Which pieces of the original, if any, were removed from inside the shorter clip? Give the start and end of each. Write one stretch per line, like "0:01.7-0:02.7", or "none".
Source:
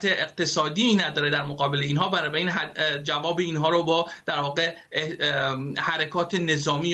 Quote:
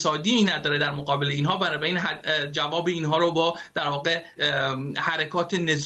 0:04.9-0:05.2